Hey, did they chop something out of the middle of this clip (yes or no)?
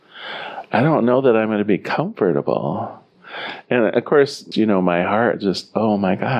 yes